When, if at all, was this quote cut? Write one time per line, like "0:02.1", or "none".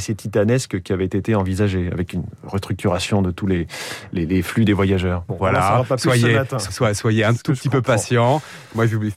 0:05.3
0:06.7